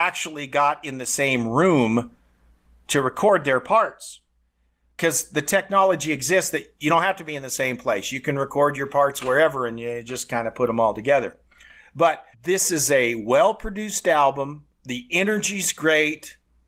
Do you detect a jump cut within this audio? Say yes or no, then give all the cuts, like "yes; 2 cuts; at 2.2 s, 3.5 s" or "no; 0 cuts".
yes; 2 cuts; at 12.3 s, 14.7 s